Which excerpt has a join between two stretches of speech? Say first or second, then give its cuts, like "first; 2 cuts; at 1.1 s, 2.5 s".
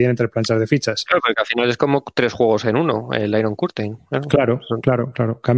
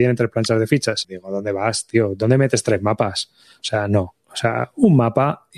second; 1 cut; at 1.0 s